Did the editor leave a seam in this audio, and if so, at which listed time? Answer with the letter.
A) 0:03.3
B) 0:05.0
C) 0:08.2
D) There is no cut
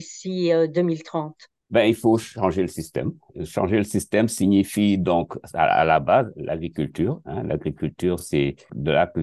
D